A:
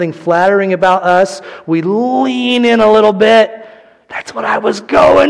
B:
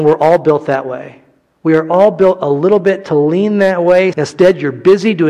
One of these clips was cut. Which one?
B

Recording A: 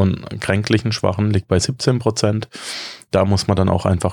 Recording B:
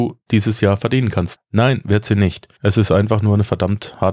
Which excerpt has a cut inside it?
B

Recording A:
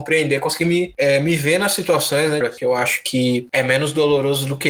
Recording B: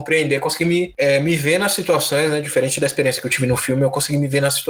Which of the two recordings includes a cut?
A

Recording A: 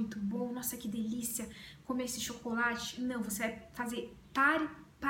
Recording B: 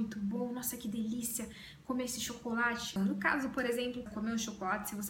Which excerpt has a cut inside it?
B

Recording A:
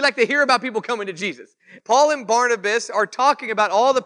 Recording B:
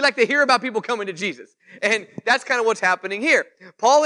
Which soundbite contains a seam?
A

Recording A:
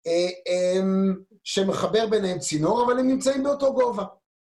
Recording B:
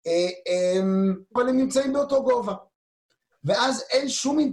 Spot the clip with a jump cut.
B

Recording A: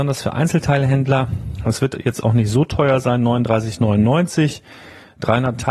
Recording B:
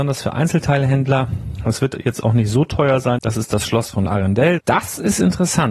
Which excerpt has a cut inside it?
B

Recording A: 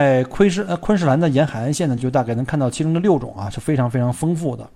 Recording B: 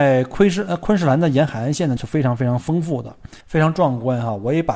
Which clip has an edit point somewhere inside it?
B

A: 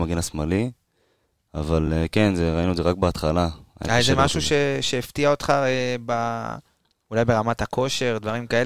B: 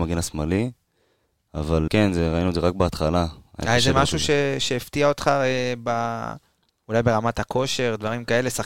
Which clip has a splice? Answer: B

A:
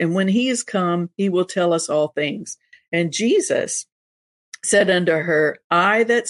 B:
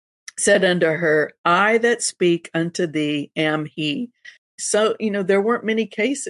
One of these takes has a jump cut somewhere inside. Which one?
B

